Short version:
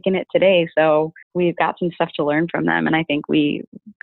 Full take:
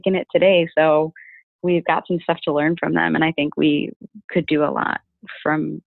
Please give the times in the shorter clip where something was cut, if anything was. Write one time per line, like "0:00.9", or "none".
0:01.2

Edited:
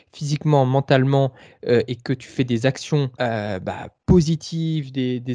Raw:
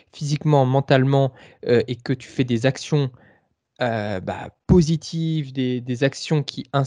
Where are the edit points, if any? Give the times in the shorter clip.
0:03.1

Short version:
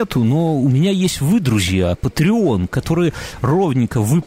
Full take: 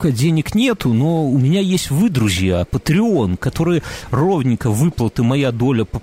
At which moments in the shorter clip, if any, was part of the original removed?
none

